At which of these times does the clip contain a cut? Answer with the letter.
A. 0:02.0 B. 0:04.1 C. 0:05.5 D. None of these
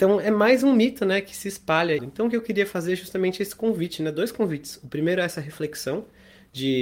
A